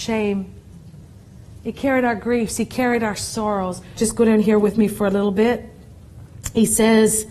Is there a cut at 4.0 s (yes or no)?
yes